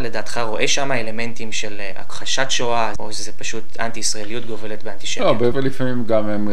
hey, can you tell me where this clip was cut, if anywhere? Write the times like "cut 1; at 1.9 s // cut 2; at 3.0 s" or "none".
cut 1; at 3.0 s // cut 2; at 5.5 s